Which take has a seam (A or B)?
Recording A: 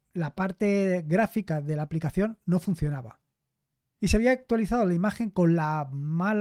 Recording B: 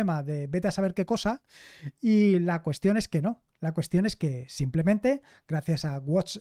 A